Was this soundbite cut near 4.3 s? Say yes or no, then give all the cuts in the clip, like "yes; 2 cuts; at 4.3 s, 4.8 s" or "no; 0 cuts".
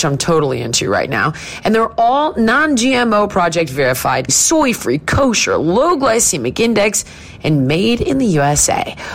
yes; 1 cut; at 4.3 s